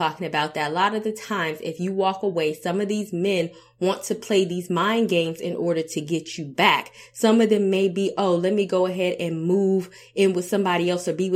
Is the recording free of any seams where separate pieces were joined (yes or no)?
yes